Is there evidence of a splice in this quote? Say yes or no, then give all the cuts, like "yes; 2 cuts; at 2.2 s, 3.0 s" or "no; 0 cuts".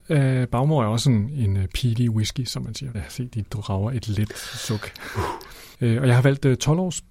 yes; 3 cuts; at 1.3 s, 2.9 s, 5.7 s